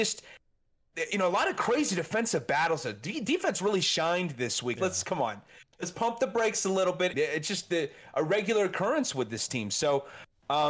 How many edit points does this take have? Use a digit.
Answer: 2